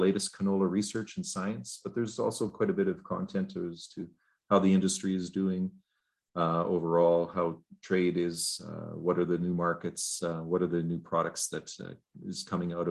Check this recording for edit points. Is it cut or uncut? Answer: uncut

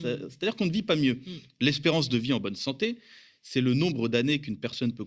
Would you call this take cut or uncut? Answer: uncut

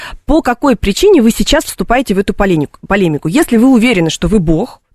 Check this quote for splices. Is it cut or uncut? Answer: uncut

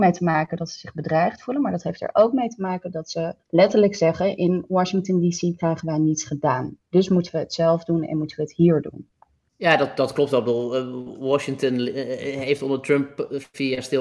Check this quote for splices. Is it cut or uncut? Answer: cut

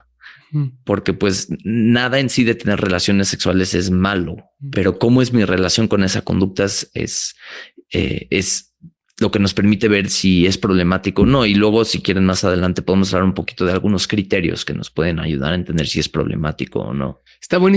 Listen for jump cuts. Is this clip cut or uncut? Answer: uncut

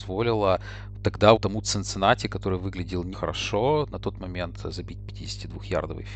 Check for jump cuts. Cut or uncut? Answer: cut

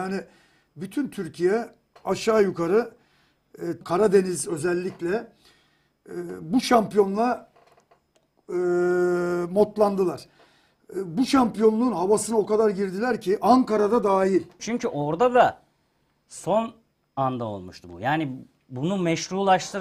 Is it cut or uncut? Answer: cut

